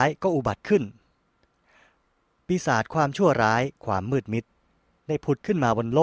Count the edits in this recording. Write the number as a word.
zero